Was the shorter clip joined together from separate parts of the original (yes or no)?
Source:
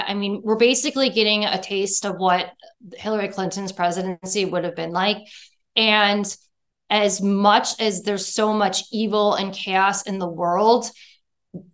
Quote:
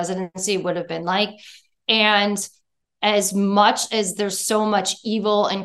no